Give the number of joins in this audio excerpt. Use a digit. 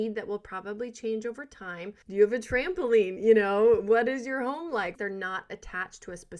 2